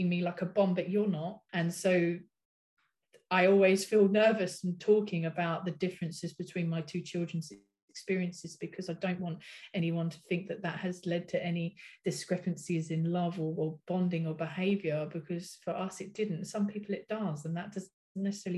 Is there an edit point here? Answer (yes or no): yes